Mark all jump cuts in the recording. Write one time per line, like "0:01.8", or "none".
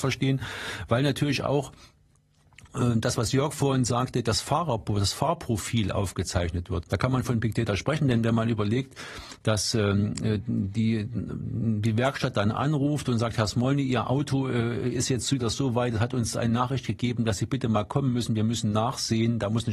0:06.8